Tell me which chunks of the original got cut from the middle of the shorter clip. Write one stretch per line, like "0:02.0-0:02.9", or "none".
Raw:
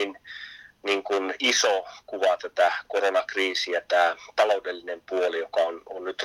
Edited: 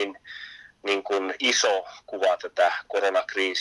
none

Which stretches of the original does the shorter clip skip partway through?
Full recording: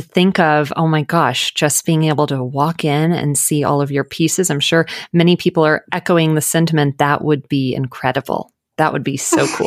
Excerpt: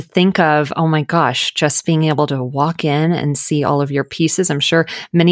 none

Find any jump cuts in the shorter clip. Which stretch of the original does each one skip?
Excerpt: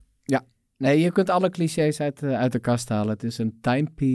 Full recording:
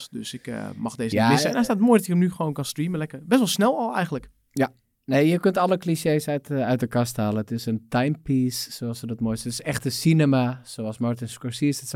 none

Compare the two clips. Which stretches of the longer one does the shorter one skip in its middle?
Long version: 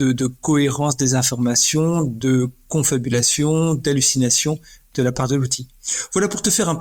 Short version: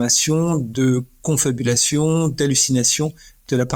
none

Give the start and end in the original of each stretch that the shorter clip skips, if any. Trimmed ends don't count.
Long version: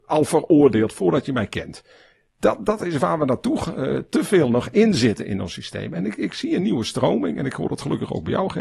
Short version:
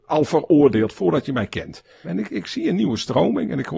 0:02.0-0:05.9

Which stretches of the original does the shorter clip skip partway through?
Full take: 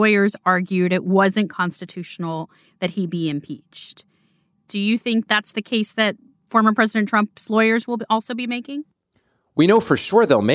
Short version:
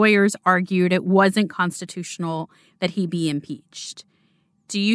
none

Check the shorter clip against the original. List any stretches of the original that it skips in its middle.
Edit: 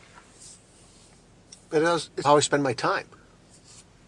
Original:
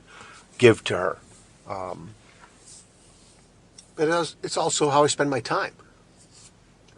0:04.5-0:04.9

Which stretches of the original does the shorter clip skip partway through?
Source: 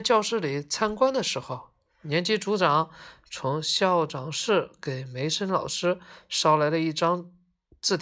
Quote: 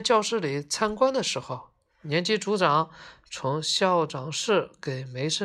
none

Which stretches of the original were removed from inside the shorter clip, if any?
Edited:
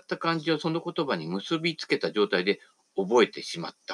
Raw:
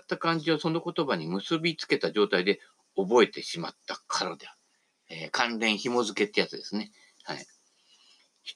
none

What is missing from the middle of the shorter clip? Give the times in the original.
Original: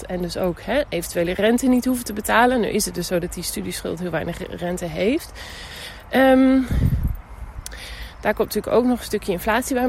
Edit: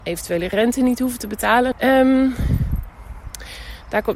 0:02.6-0:06.0

